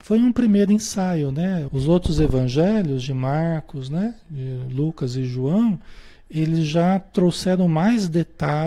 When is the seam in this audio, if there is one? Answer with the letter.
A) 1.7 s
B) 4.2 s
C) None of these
A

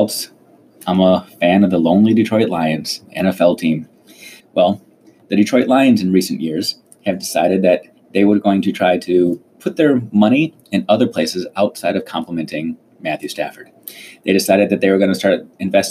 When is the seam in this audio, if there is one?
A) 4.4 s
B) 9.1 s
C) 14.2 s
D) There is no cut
A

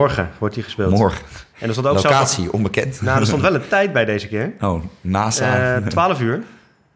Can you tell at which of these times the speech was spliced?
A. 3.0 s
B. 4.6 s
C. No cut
C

